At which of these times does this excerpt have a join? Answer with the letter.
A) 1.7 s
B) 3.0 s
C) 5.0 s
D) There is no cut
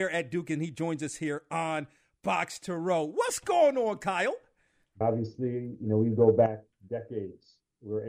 C